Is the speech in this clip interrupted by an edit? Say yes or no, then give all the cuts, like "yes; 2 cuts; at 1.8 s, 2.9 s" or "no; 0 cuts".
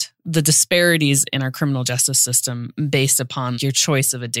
no; 0 cuts